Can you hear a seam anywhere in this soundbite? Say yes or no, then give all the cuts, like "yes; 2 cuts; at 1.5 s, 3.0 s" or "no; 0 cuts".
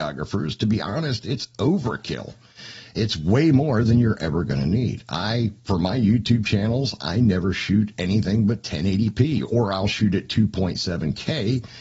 no; 0 cuts